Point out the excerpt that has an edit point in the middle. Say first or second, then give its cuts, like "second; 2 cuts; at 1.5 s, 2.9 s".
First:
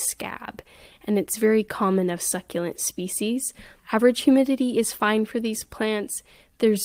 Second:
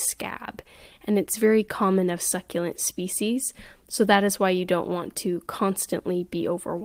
first; 1 cut; at 3.8 s